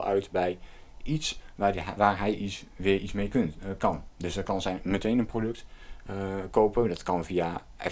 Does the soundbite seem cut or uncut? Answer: uncut